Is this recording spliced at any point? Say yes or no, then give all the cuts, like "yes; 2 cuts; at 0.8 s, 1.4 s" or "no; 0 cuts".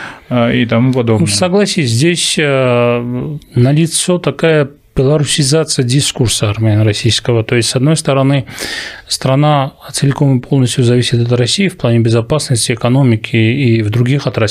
no; 0 cuts